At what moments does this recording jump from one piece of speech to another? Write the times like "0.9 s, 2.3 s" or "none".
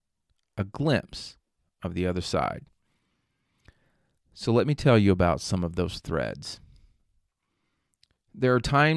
none

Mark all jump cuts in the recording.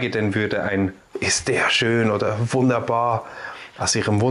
1.1 s

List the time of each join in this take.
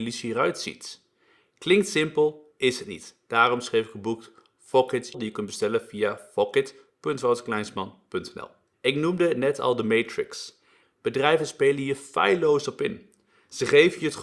5.1 s, 8.7 s, 10.8 s

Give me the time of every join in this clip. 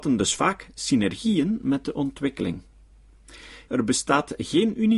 3.7 s

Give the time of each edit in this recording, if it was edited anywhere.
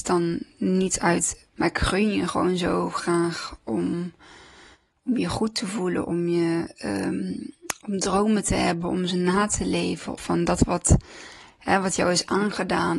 1.5 s, 10.2 s

